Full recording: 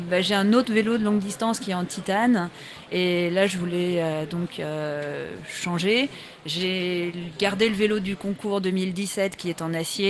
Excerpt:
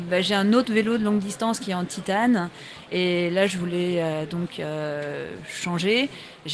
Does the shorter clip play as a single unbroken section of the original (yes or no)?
yes